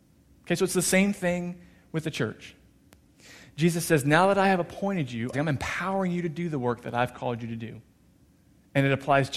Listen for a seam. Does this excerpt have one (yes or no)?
yes